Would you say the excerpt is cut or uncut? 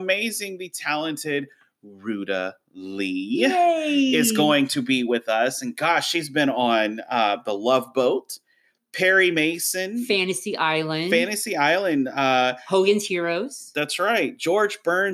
uncut